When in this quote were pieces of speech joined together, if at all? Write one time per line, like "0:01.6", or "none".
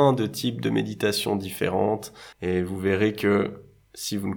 0:02.3